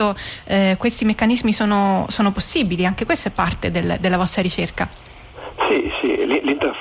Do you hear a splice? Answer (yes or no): no